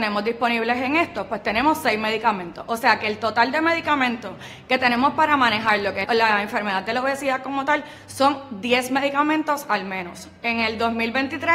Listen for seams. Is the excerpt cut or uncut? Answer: cut